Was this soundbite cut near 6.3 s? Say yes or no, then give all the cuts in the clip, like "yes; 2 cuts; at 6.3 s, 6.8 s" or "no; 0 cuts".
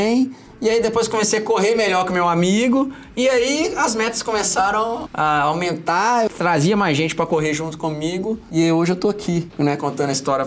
yes; 2 cuts; at 5.1 s, 6.3 s